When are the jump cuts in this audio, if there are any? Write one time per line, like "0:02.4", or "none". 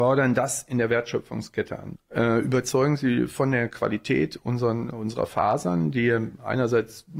0:01.9